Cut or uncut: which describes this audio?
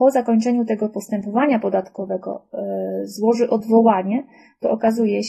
uncut